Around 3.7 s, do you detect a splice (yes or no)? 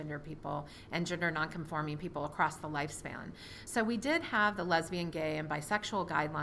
no